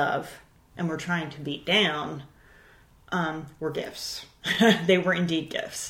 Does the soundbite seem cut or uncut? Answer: uncut